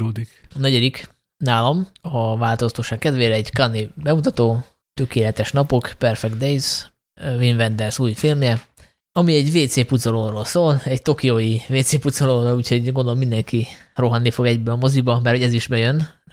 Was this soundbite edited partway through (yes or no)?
no